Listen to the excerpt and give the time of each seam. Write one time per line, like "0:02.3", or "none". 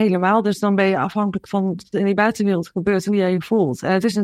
0:01.9